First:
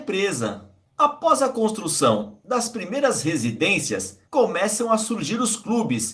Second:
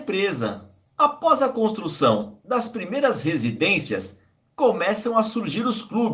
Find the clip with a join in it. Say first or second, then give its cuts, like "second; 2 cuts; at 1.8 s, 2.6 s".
first; 1 cut; at 4.3 s